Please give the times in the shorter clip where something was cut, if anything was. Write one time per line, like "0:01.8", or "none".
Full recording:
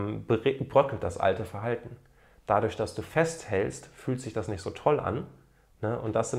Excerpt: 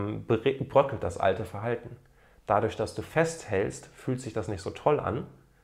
none